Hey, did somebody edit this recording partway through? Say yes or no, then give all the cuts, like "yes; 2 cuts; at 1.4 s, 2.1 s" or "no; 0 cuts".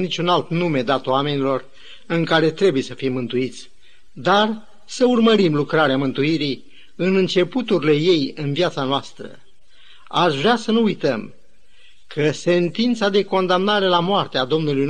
yes; 1 cut; at 4.1 s